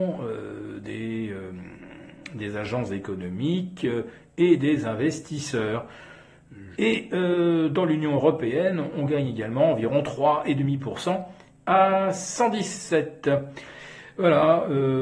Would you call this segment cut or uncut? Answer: cut